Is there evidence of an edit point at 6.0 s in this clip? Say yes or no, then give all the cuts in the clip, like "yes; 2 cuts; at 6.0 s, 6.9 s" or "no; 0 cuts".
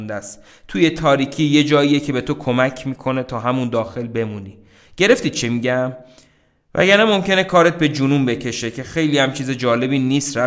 no; 0 cuts